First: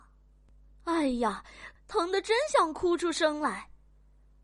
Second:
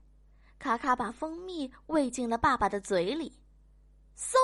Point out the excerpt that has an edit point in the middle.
first; 1 cut; at 1.8 s

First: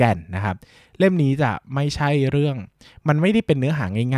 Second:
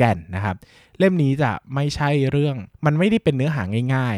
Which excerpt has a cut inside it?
second; 1 cut; at 2.7 s

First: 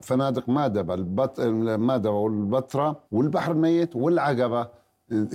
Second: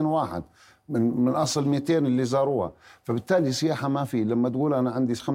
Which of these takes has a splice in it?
first; 1 cut; at 3.0 s

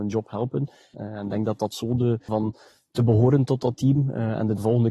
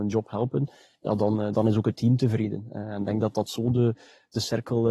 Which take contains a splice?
first; 2 cuts; at 0.9 s, 2.3 s

